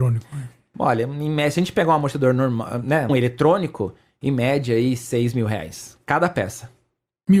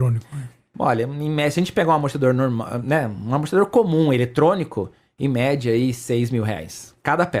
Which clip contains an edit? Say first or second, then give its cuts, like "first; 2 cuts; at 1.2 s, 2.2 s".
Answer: first; 1 cut; at 3.1 s